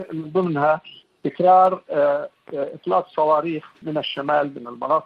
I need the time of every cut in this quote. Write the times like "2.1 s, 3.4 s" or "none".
3.8 s